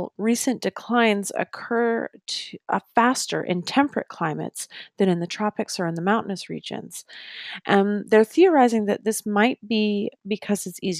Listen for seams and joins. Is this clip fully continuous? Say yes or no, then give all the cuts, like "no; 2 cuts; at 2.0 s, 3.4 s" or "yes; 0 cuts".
yes; 0 cuts